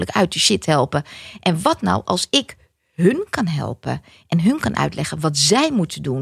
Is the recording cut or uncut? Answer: uncut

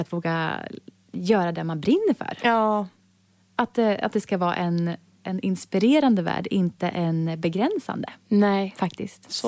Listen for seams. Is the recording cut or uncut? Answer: uncut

